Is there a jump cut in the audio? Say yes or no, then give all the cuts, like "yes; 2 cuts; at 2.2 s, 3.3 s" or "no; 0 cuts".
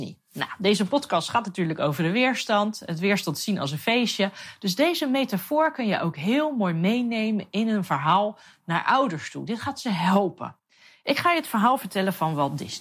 no; 0 cuts